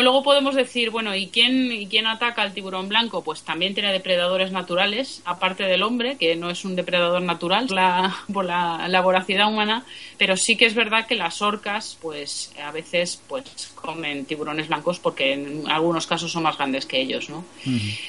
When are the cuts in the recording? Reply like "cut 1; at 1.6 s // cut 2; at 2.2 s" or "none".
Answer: cut 1; at 7.7 s